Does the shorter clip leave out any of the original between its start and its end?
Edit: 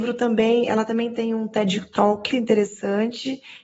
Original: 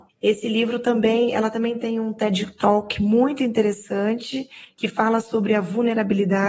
yes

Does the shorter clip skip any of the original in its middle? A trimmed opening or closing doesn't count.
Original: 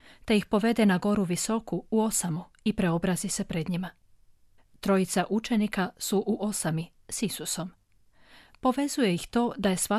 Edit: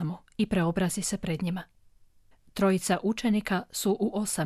no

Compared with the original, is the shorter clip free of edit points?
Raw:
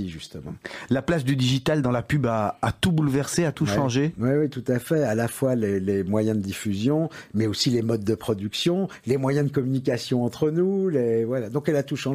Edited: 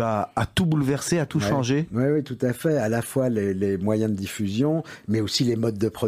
yes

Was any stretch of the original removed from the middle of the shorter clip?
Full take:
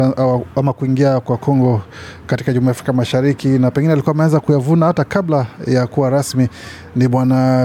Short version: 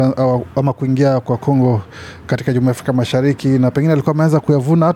no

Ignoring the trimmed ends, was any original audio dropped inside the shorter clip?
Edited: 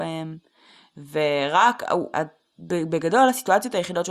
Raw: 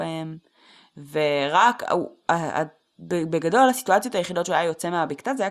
yes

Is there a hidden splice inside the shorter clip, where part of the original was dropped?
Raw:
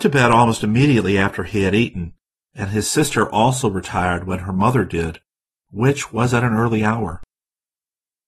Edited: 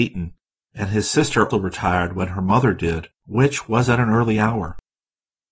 yes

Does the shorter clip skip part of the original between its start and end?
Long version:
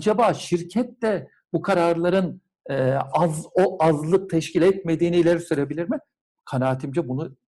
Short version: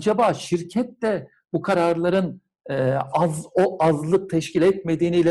no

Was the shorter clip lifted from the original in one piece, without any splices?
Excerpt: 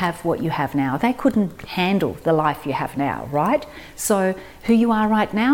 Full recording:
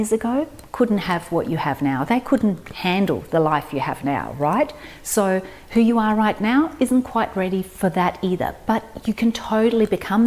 yes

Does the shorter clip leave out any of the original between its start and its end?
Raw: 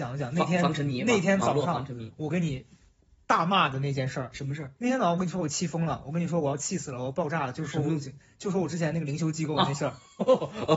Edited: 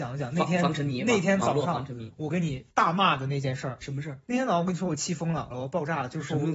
yes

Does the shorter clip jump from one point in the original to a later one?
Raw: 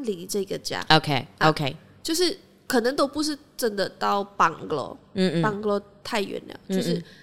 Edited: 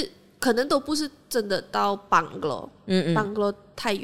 no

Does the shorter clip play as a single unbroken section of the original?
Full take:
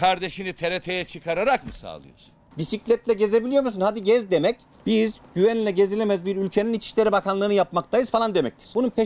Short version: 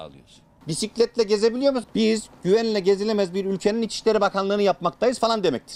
no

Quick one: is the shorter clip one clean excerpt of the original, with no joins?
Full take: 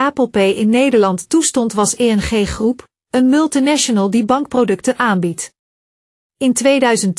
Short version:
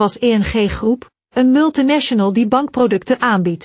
yes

